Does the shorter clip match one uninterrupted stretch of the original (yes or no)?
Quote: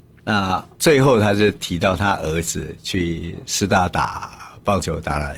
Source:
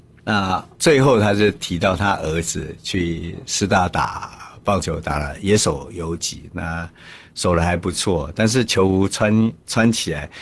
yes